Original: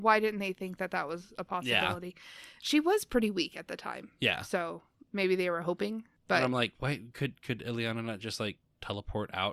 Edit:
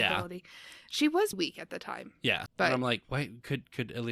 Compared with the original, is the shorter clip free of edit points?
no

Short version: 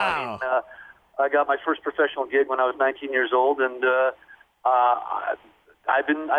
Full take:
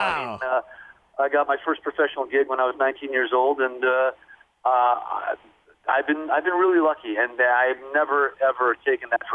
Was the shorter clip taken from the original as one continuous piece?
yes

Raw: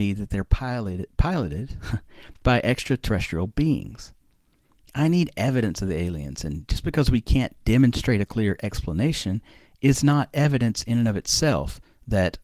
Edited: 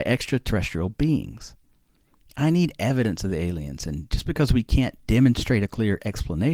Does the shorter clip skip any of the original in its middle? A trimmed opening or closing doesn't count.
no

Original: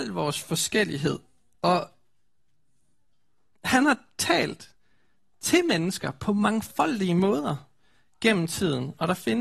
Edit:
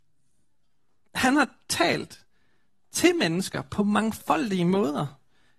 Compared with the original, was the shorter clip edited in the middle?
no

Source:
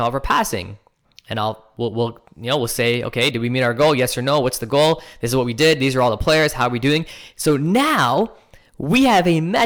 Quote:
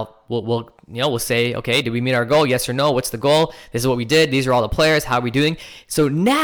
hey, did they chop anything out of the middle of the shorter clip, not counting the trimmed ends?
no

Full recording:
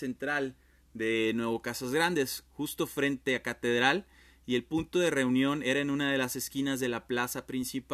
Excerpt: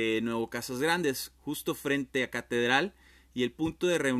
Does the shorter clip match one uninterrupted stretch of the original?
yes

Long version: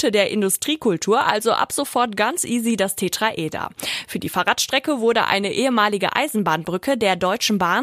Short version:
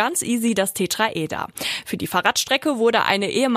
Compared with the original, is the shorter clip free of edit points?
yes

